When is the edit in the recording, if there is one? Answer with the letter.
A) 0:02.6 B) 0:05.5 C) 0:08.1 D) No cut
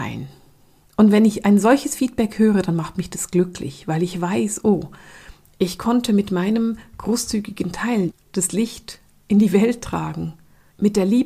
C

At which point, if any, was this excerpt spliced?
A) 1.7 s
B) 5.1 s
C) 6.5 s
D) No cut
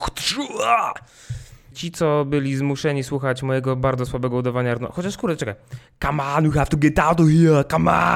A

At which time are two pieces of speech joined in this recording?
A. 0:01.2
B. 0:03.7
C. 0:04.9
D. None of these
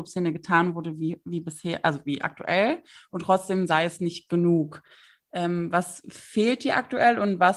D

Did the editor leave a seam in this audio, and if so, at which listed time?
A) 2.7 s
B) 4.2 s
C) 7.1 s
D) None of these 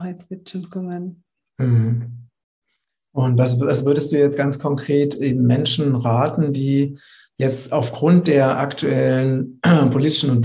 D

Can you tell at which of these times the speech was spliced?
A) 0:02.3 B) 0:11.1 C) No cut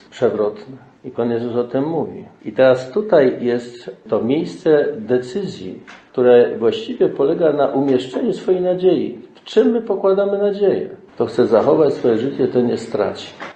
B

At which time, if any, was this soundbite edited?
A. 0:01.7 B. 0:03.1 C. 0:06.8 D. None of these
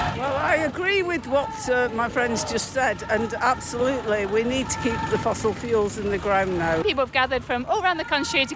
C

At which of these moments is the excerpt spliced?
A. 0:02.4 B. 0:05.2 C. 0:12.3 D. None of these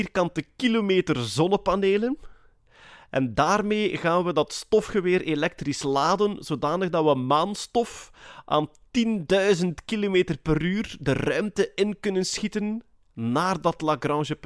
D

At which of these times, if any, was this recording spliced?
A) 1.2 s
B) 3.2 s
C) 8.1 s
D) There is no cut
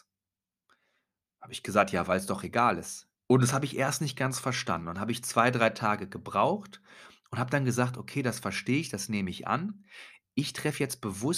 B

